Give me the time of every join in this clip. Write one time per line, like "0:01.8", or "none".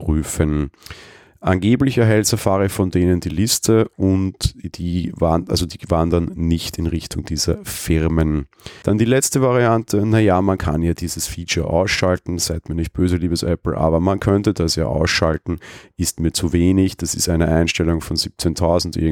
0:08.8